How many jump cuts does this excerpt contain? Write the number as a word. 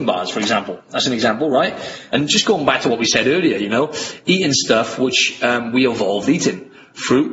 one